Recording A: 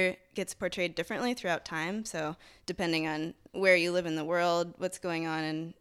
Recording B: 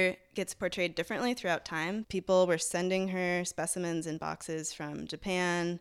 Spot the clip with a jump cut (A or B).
B